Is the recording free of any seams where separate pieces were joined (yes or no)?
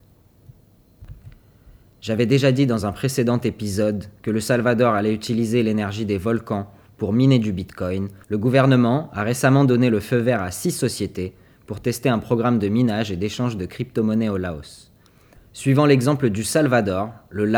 no